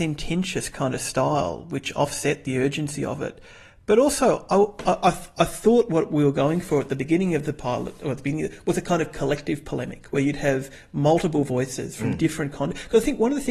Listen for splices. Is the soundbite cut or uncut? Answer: uncut